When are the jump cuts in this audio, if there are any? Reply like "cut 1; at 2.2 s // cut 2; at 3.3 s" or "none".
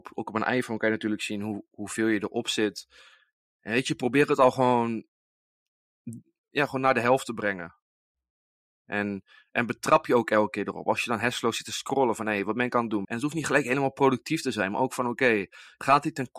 cut 1; at 13.0 s